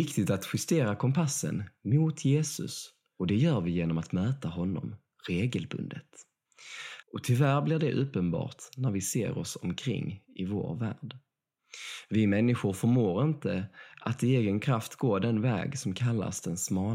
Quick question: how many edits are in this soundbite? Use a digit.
1